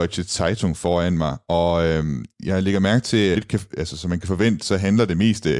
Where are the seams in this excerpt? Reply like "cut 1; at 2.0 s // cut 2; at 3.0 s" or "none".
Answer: cut 1; at 3.3 s